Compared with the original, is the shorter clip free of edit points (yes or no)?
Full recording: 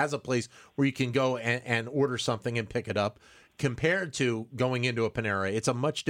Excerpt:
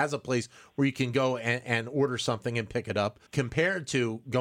no